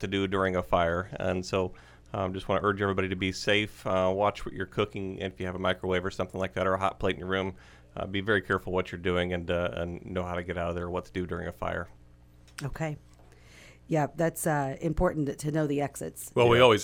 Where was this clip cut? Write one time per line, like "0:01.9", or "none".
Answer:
none